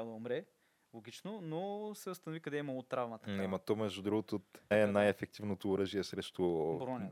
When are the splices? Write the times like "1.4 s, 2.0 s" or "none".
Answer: 4.7 s

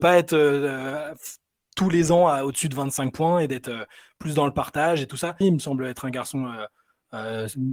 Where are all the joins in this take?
5.4 s

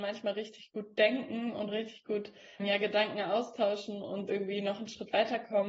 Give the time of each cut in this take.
2.6 s, 4.3 s

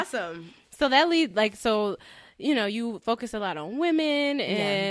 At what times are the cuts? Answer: none

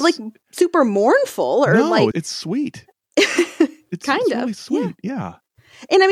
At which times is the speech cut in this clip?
2.1 s

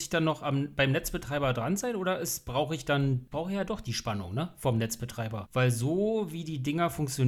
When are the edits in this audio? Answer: 3.3 s

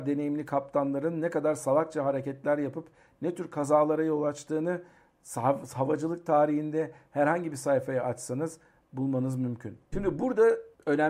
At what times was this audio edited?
9.9 s

